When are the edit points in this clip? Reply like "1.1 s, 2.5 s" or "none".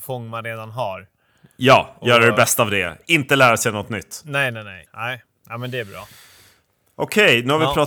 4.9 s